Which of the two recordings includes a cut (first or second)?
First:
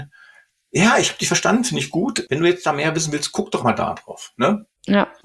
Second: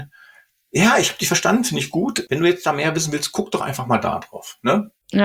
first